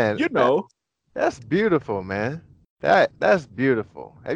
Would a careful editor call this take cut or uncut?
uncut